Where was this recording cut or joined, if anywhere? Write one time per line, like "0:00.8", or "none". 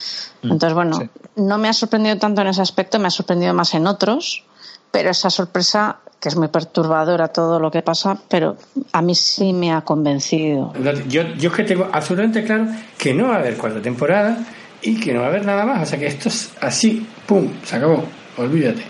0:10.7